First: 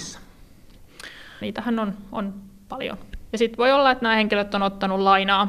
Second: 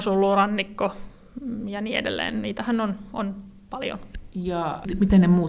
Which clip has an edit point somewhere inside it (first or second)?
first